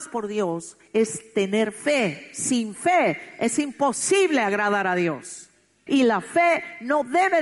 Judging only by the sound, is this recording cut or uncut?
cut